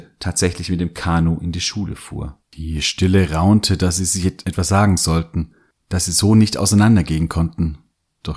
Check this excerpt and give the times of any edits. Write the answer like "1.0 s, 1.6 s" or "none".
2.4 s